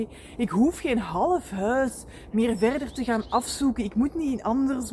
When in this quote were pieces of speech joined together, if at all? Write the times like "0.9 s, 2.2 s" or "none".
none